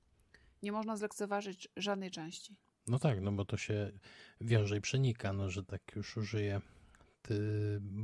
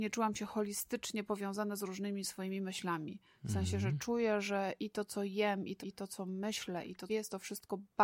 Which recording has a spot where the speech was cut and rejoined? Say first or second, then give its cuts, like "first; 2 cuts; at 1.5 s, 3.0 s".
second; 2 cuts; at 5.8 s, 7.1 s